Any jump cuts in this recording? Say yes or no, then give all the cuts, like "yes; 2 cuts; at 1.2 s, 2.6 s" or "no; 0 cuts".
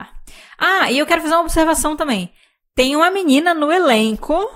no; 0 cuts